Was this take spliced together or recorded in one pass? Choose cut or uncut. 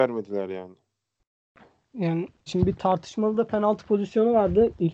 cut